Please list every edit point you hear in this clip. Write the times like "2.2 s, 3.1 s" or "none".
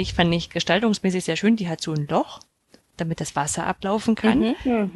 none